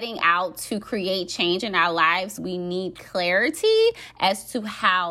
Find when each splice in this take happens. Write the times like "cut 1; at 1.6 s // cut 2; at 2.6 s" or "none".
none